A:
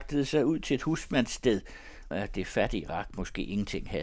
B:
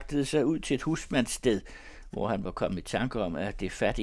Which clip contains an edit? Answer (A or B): A